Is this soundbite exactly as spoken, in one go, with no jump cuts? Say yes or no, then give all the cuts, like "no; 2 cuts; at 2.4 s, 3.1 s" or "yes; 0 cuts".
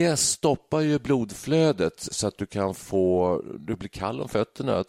no; 1 cut; at 2.1 s